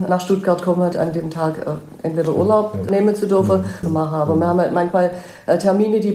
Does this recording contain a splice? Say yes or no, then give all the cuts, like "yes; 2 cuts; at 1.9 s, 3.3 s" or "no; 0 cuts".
yes; 2 cuts; at 0.9 s, 3.8 s